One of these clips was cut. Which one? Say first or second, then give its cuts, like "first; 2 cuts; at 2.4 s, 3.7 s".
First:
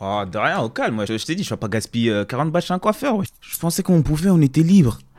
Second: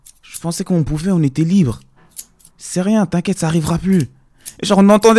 first; 2 cuts; at 1.1 s, 3.3 s